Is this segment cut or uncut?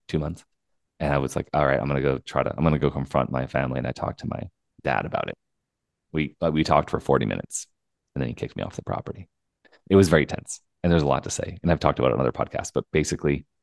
uncut